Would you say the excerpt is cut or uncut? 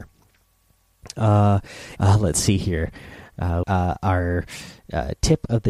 cut